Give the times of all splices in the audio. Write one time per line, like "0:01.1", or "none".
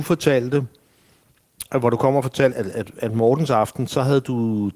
0:02.5